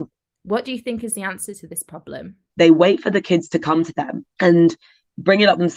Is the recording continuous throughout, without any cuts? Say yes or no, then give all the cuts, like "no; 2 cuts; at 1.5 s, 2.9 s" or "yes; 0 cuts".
no; 2 cuts; at 2.5 s, 4.3 s